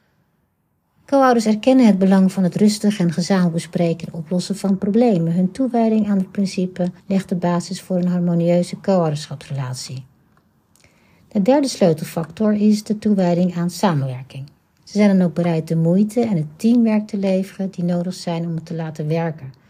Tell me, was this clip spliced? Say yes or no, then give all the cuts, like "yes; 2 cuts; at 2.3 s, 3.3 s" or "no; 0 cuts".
yes; 2 cuts; at 7.0 s, 14.8 s